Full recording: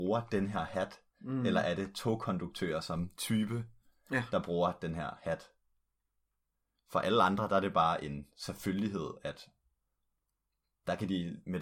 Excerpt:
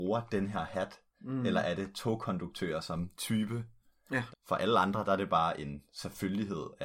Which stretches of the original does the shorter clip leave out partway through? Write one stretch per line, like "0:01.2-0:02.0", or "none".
0:04.3-0:06.7